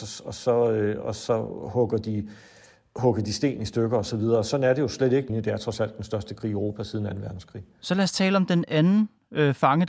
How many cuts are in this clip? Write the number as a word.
one